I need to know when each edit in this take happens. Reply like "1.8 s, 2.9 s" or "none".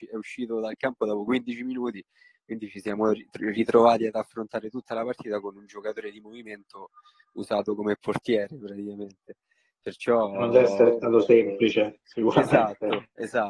none